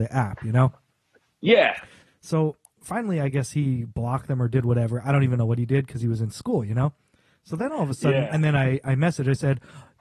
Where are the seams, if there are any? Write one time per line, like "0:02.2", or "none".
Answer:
0:02.0
0:08.3